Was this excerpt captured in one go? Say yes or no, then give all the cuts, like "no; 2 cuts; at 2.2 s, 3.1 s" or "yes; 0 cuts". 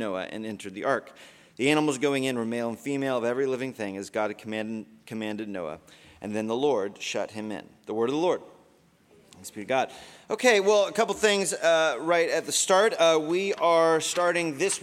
yes; 0 cuts